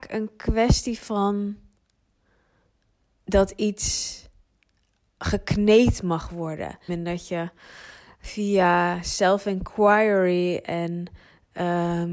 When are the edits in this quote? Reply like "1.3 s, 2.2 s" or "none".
6.9 s